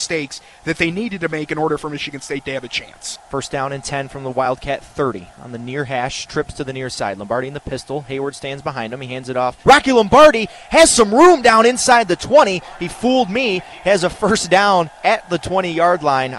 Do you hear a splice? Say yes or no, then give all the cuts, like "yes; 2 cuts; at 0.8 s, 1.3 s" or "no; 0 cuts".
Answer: yes; 1 cut; at 9.6 s